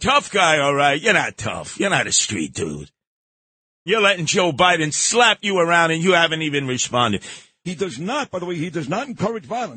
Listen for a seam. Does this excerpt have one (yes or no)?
yes